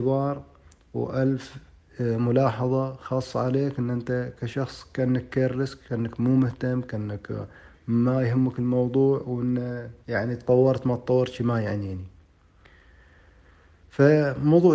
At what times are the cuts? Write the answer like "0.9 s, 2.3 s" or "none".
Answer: 10.0 s